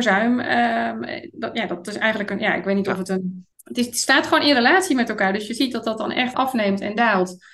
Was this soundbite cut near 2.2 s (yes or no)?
no